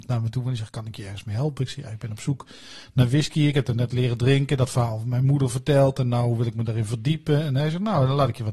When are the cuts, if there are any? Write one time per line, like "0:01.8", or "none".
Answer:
none